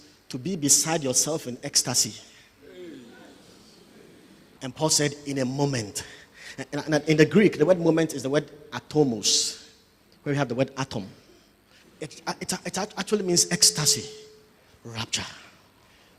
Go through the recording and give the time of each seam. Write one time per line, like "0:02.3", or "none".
0:04.6
0:11.8